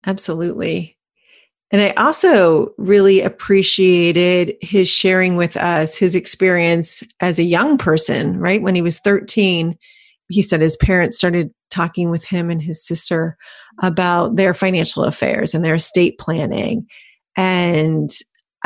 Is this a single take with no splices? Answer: yes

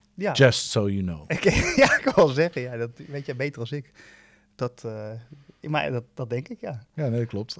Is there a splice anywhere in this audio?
no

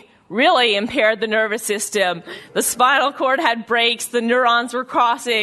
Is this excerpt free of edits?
yes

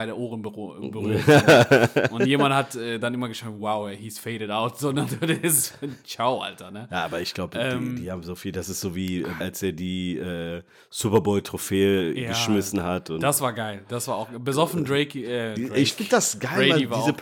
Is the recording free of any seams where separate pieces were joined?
no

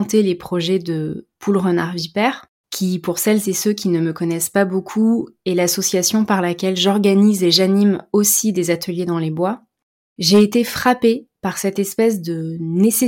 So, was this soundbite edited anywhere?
no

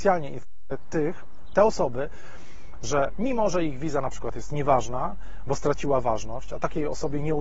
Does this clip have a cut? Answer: no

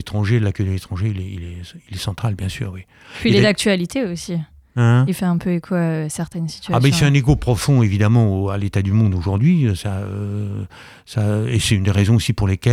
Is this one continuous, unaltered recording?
yes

